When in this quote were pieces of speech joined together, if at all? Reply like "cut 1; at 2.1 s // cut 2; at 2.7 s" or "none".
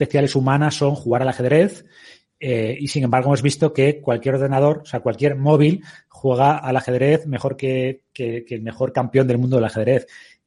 none